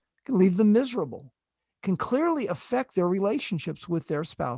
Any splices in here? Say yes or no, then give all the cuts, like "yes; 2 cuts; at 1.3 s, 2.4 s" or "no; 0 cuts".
no; 0 cuts